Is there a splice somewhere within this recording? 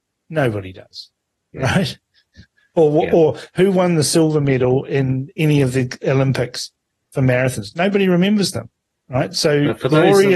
no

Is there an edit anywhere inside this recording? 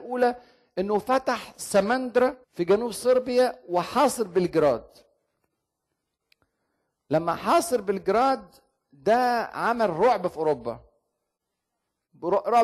yes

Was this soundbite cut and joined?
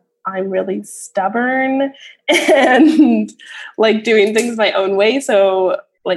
no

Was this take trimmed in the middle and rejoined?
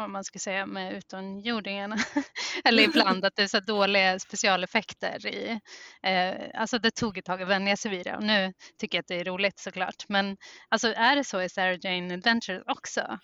no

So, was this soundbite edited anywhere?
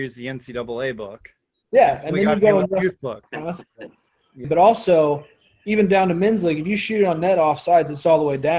yes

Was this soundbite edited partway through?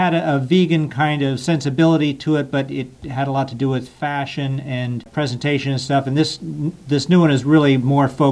no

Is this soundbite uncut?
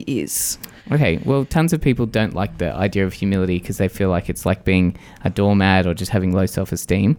yes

